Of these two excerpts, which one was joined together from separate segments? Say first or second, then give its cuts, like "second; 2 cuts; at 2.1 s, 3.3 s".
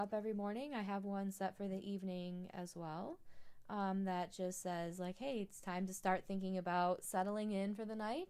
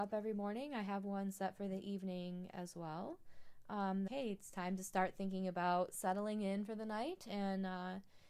second; 1 cut; at 4.1 s